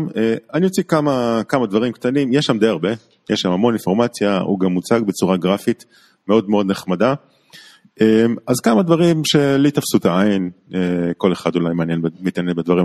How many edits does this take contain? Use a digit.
0